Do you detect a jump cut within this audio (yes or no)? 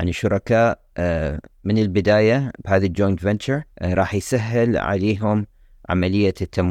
yes